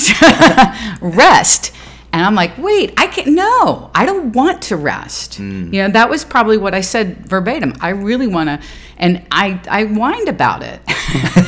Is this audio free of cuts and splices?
no; 1 cut; at 7.8 s

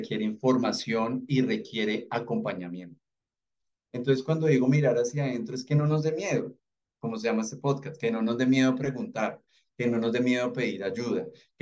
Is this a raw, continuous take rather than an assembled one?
yes; 0 cuts

